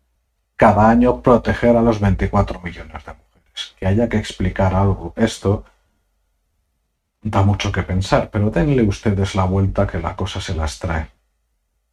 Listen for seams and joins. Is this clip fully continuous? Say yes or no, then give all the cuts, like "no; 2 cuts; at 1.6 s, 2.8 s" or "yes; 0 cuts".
yes; 0 cuts